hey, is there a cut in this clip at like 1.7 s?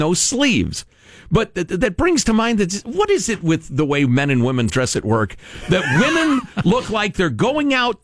yes; 2 cuts; at 1.7 s, 4.7 s

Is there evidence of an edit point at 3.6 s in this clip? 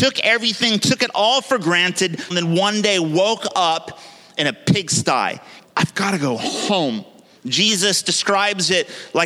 no; 3 cuts; at 2.3 s, 5.6 s, 7.4 s

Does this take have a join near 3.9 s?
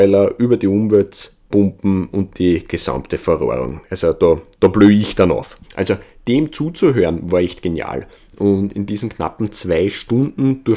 no; 1 cut; at 5.6 s

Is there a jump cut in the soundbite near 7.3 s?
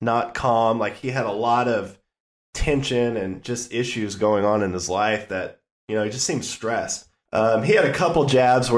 yes; 1 cut; at 7.3 s

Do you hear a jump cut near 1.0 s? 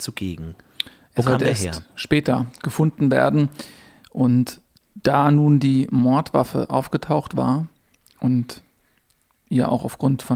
no; 0 cuts

